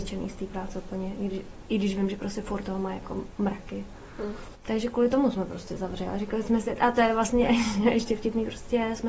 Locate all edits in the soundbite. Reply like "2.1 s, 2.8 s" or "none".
4.5 s